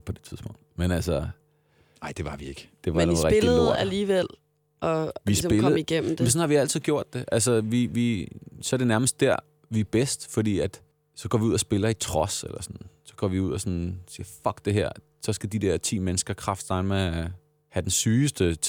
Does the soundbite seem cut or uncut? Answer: uncut